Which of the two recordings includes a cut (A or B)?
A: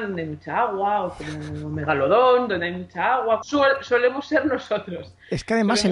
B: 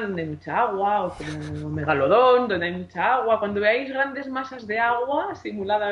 A